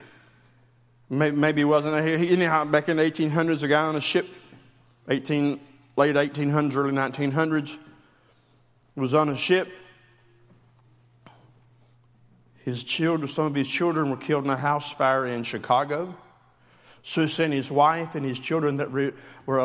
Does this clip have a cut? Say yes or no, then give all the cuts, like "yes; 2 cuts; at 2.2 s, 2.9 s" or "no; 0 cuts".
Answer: no; 0 cuts